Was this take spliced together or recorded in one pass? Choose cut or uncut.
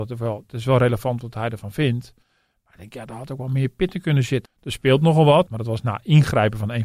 cut